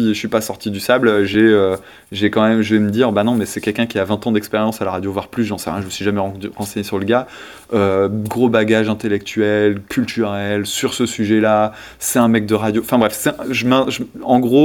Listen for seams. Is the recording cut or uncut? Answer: uncut